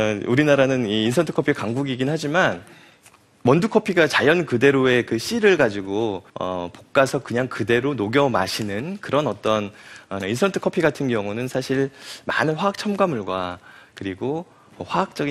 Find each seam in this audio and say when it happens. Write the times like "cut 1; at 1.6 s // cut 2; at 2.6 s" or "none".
cut 1; at 6.3 s // cut 2; at 10.2 s